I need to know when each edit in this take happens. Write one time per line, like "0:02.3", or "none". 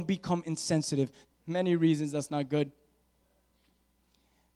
0:01.3